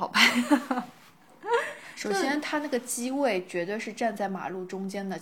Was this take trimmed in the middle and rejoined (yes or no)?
no